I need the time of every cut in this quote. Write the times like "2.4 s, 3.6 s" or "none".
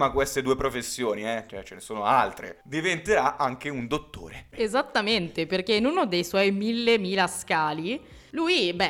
4.5 s